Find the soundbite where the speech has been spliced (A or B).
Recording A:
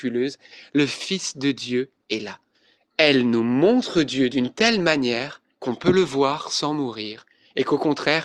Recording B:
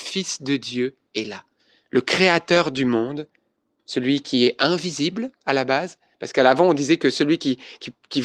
A